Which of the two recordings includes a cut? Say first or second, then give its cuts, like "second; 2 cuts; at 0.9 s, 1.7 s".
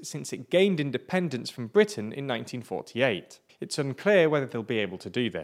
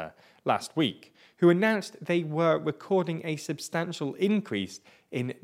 first; 1 cut; at 3.5 s